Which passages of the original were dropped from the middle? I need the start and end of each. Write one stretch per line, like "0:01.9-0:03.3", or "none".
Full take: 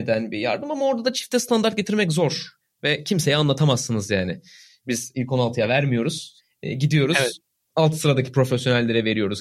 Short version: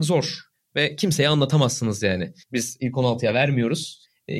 0:04.5-0:04.8